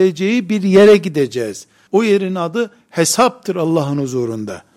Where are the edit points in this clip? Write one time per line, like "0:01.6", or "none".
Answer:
0:01.9

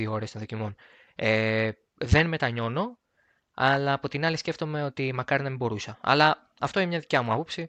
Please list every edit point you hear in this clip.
none

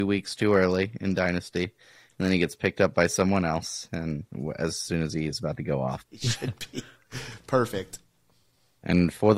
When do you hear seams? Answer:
0:06.0

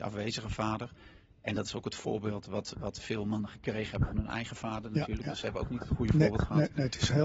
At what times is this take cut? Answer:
none

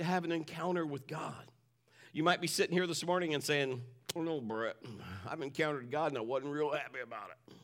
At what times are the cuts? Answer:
0:04.2

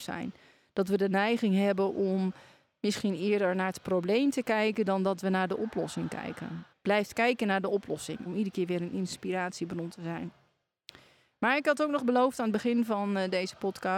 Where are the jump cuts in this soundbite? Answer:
0:06.7
0:08.3

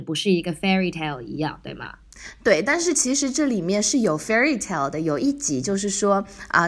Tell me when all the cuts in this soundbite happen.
none

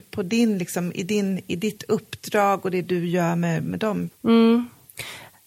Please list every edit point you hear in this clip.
0:04.1

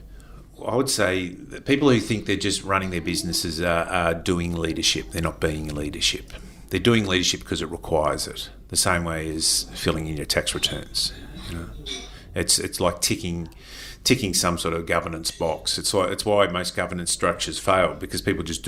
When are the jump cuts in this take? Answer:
none

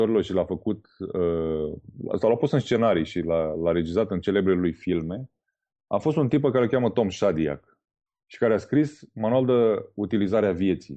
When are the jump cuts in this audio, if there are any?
none

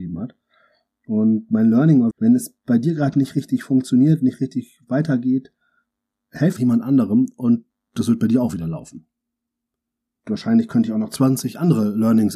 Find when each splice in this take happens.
0:02.1
0:06.6

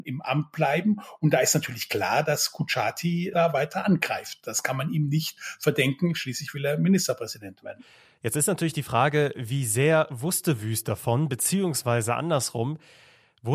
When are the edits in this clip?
none

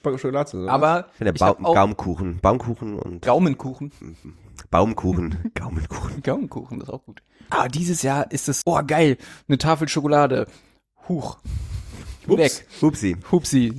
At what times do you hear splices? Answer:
0:07.5
0:08.6

